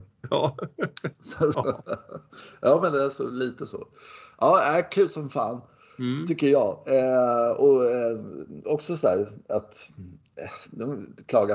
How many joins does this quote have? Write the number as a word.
one